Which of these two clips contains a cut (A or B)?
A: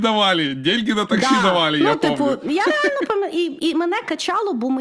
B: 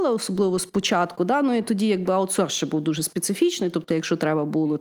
B